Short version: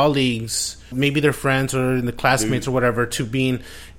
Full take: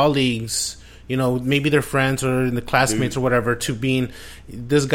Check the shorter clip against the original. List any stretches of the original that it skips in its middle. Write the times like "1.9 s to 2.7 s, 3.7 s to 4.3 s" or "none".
0.9 s to 1.4 s